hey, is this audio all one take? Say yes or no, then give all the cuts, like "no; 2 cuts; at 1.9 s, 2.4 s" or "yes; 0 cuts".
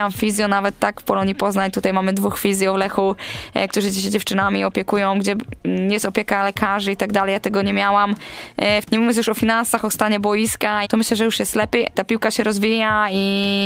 no; 3 cuts; at 8.8 s, 10.8 s, 11.9 s